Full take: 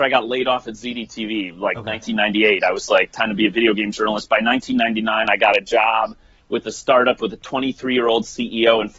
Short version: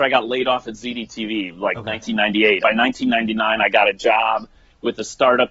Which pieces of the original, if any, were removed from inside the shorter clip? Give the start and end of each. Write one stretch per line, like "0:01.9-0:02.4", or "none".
0:02.6-0:04.3